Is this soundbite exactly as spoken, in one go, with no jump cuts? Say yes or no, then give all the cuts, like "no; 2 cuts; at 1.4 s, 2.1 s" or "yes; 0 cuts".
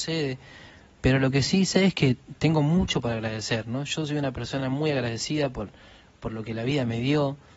yes; 0 cuts